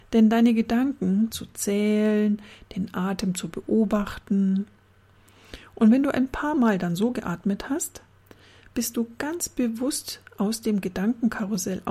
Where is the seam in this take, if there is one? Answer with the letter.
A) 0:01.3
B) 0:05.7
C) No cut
A